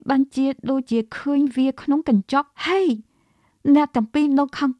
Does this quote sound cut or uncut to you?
cut